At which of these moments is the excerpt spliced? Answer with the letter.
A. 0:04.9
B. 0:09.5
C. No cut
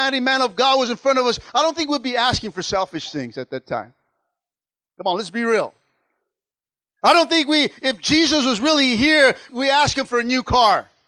B